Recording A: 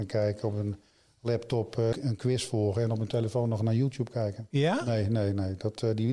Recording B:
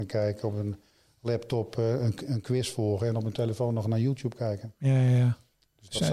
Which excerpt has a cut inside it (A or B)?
A